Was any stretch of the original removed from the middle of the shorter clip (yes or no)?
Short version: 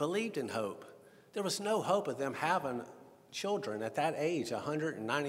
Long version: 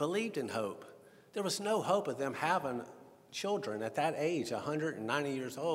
no